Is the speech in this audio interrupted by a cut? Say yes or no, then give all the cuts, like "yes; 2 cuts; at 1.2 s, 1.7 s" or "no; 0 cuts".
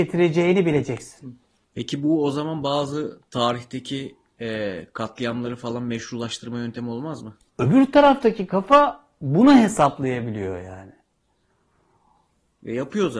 yes; 1 cut; at 7.5 s